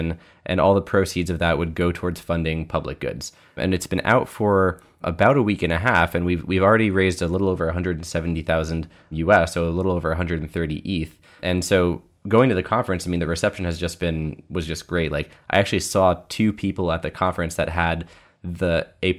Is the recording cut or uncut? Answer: uncut